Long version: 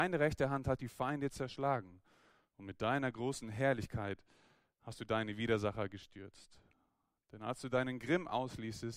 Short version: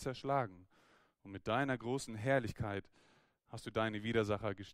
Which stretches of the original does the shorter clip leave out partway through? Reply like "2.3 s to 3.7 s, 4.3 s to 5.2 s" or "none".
none